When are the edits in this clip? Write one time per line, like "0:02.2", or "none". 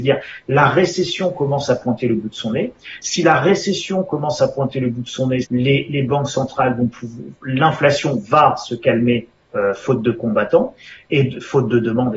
0:05.4